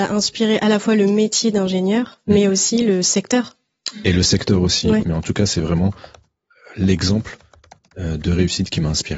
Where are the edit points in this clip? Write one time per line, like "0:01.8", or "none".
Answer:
0:05.0